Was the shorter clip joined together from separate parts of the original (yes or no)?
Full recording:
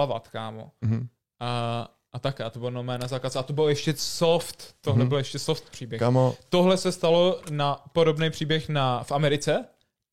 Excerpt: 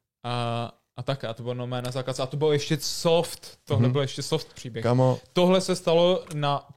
no